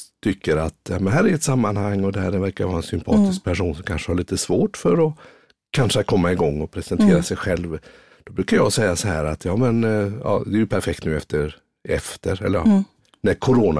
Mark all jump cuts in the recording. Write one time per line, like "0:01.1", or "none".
none